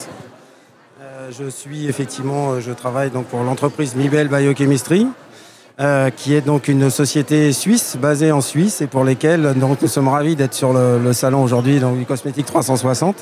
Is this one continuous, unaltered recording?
yes; 0 cuts

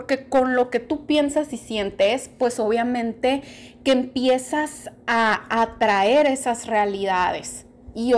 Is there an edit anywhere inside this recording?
no; 0 cuts

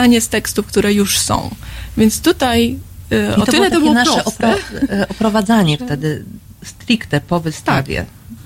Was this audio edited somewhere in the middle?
no; 0 cuts

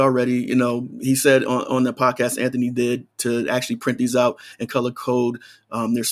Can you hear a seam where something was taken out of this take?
no; 0 cuts

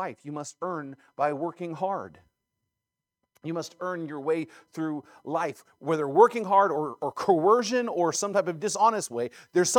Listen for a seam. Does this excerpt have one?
no; 0 cuts

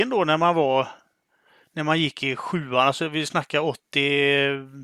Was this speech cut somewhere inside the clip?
no; 0 cuts

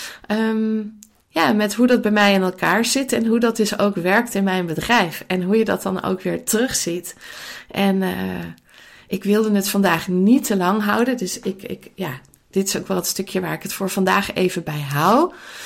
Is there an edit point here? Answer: no; 0 cuts

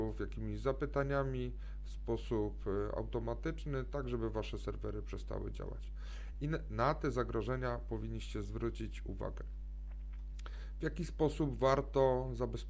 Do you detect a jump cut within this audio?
no; 0 cuts

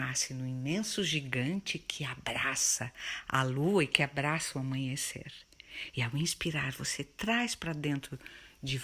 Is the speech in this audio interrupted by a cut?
no; 0 cuts

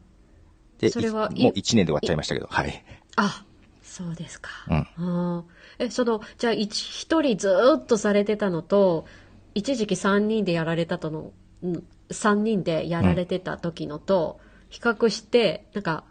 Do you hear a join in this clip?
no; 0 cuts

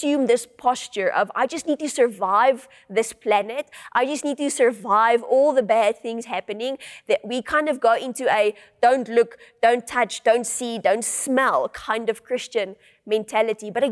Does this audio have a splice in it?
no; 0 cuts

